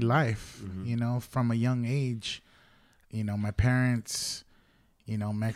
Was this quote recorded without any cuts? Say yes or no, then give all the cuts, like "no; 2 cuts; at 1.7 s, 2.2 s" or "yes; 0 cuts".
yes; 0 cuts